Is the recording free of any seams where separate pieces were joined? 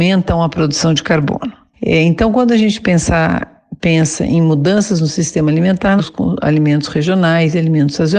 no; 2 cuts; at 1.7 s, 6.0 s

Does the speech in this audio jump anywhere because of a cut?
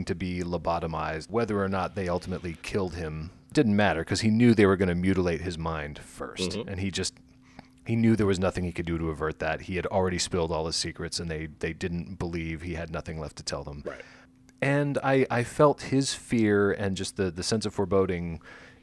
no; 0 cuts

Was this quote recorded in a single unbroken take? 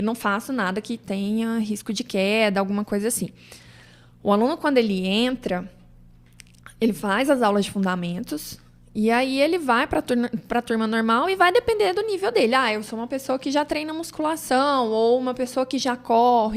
yes; 0 cuts

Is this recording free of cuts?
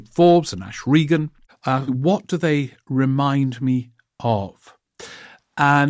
no; 1 cut; at 1.9 s

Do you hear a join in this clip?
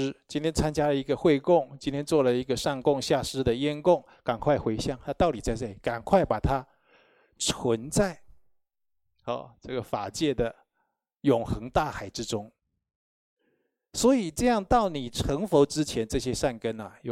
no; 0 cuts

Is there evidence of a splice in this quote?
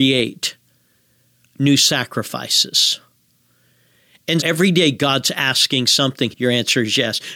yes; 2 cuts; at 4.4 s, 6.3 s

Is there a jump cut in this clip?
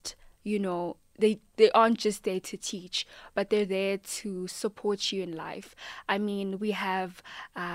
no; 0 cuts

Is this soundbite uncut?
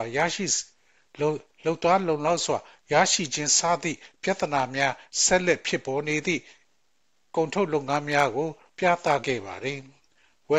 yes; 0 cuts

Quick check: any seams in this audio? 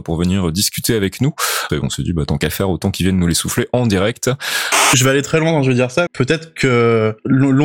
yes; 2 cuts; at 1.7 s, 6.1 s

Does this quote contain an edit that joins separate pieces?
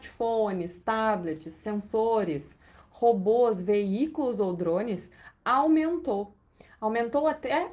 no; 0 cuts

